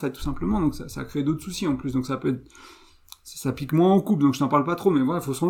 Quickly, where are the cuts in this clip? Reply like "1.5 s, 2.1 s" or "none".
none